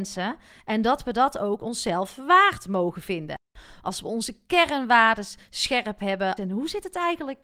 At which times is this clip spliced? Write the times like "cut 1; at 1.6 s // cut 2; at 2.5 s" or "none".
cut 1; at 3.8 s // cut 2; at 6.4 s